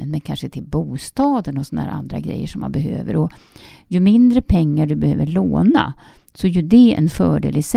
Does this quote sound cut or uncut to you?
uncut